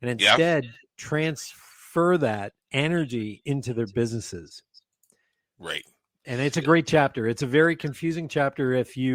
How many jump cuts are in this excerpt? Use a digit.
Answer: 0